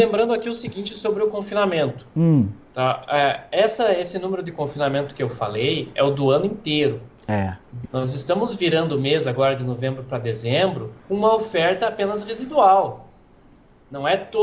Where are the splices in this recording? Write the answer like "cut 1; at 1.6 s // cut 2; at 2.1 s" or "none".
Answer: cut 1; at 7.9 s // cut 2; at 11.0 s